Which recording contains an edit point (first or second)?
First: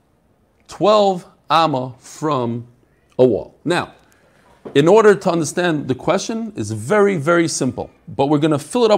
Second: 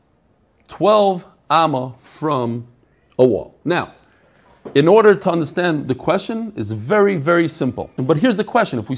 second